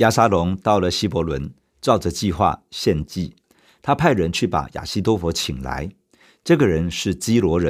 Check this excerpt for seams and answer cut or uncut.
uncut